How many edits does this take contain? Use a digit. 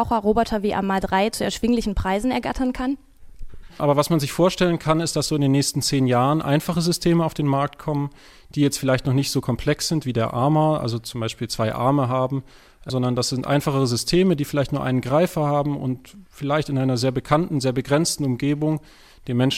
2